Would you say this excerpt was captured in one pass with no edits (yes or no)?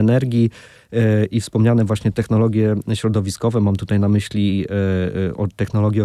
no